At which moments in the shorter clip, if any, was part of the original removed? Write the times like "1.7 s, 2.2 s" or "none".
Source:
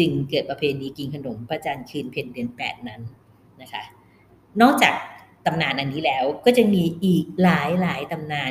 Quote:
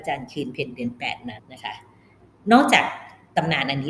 1.4 s